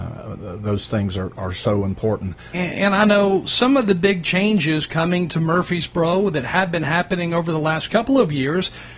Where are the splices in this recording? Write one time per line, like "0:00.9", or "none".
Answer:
0:02.5